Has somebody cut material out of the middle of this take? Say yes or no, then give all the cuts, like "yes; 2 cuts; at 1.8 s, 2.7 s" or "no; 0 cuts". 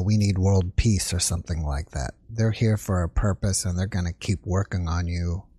no; 0 cuts